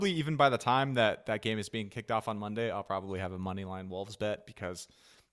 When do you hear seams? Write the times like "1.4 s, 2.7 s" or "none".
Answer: none